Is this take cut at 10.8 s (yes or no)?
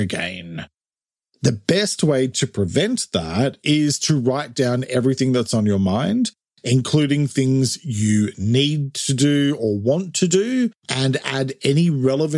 yes